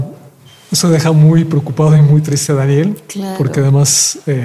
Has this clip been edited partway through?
no; 0 cuts

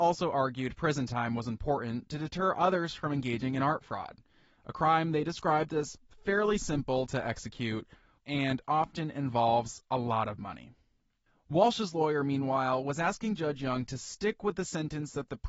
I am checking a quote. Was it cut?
yes; 1 cut; at 8.2 s

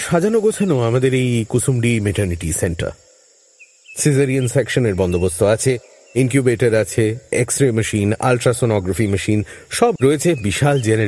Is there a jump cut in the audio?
yes; 1 cut; at 10.0 s

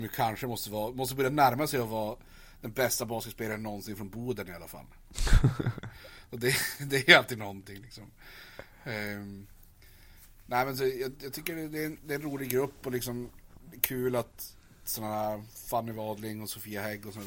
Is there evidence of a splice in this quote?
no; 0 cuts

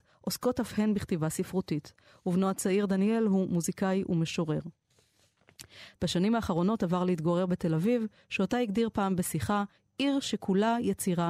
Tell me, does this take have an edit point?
yes; 1 cut; at 6.0 s

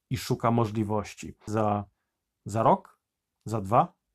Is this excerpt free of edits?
no; 1 cut; at 1.5 s

